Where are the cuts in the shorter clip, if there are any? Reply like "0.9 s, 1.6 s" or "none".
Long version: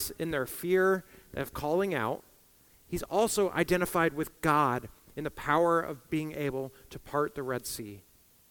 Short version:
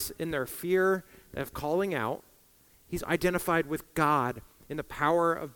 3.0 s